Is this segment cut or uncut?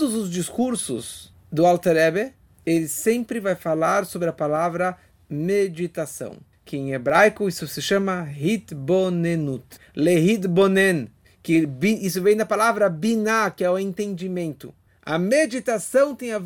uncut